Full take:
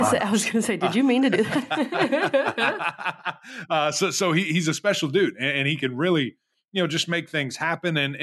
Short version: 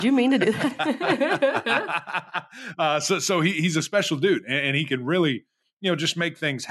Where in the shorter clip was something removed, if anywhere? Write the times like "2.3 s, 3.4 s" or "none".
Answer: none